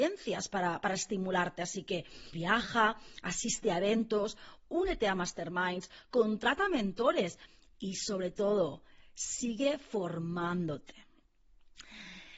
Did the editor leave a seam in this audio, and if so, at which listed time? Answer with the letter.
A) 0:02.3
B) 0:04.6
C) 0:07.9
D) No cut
A